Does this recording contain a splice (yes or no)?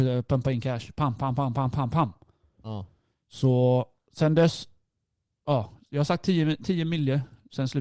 no